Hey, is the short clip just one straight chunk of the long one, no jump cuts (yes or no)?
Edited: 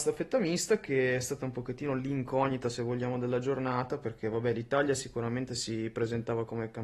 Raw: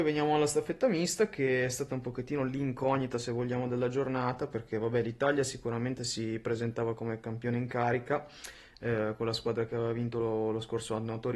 yes